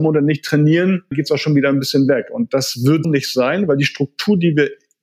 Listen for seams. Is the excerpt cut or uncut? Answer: cut